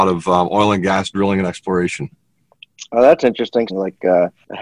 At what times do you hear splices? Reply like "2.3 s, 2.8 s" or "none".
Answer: 3.7 s